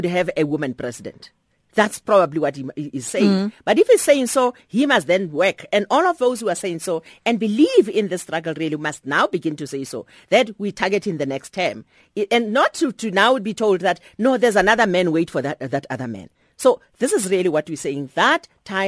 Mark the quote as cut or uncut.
uncut